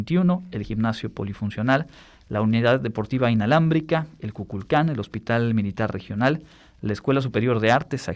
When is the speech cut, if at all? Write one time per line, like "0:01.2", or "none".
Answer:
none